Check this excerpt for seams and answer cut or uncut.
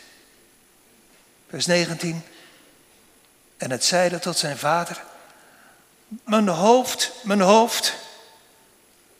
cut